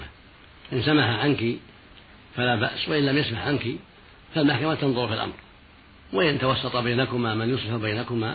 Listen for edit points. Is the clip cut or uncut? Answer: uncut